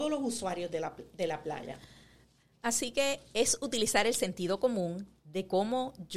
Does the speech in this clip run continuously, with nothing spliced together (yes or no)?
yes